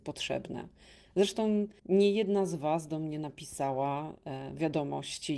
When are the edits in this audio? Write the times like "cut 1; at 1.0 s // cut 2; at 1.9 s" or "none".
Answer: cut 1; at 1.8 s